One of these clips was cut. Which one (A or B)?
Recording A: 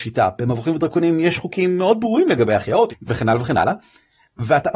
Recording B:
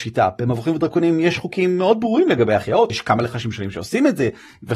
A